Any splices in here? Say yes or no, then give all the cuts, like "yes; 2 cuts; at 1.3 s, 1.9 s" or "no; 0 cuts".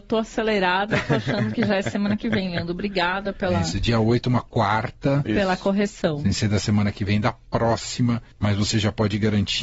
yes; 1 cut; at 8.3 s